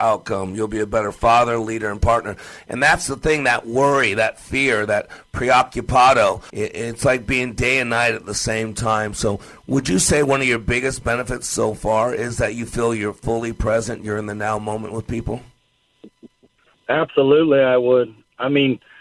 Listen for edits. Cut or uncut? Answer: cut